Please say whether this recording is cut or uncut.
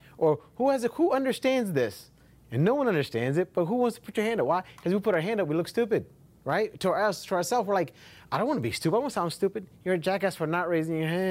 uncut